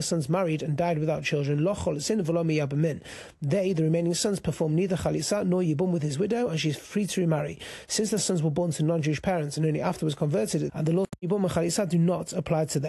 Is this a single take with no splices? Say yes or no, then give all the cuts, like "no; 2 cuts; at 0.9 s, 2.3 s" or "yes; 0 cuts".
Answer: no; 1 cut; at 10.7 s